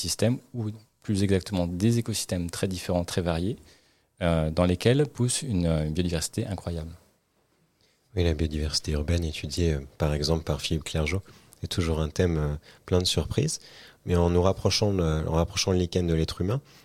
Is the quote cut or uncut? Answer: uncut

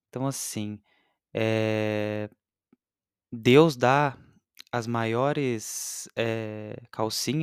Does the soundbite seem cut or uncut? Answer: uncut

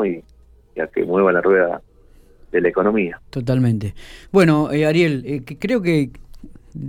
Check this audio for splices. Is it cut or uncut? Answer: uncut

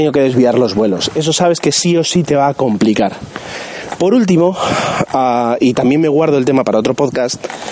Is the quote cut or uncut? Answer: uncut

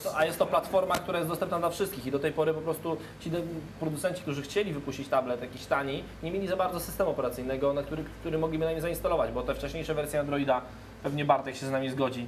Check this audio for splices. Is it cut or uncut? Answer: uncut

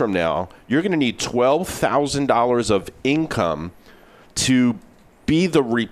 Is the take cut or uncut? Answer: uncut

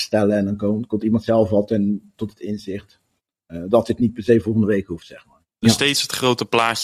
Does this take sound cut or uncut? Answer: cut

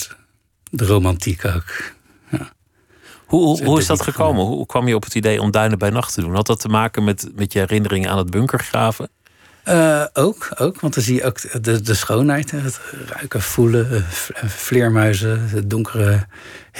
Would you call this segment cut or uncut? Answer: uncut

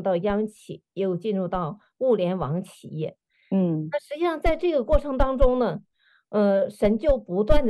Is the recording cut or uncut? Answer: uncut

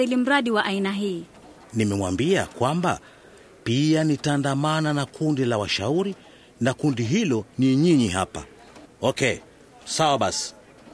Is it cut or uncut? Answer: cut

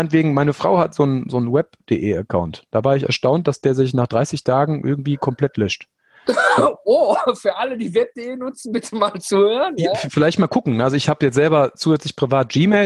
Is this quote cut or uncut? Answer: uncut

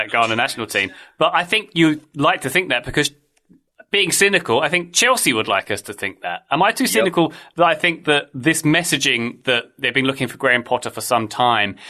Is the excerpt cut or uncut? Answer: uncut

